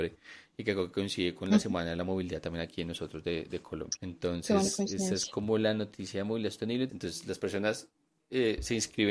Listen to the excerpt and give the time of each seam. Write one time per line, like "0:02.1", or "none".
0:04.0
0:06.9